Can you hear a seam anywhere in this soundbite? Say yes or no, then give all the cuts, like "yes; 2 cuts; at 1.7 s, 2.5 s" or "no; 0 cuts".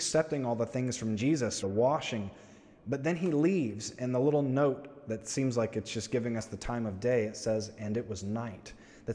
yes; 1 cut; at 1.6 s